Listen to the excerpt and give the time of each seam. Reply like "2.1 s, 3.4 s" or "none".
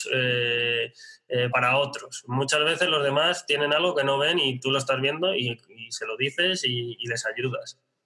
1.5 s